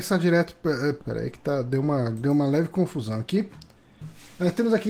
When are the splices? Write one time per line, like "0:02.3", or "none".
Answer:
0:01.0